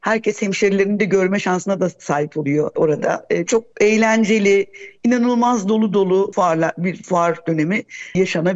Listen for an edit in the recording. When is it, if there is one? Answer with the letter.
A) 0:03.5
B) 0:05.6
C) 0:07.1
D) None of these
A